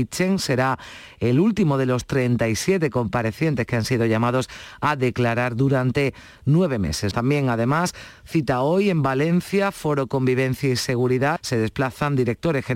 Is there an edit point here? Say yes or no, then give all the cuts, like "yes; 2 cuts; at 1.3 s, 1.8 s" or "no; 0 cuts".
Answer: yes; 2 cuts; at 7.1 s, 11.4 s